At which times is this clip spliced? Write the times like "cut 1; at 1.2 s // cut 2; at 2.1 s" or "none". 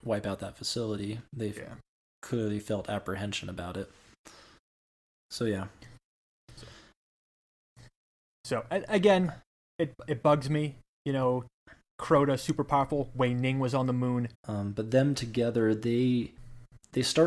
cut 1; at 14.4 s